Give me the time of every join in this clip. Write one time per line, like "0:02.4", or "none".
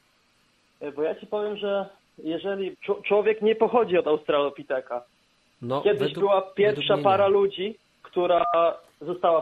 0:02.7